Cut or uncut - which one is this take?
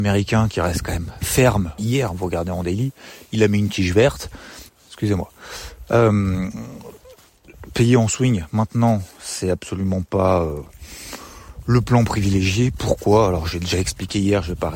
cut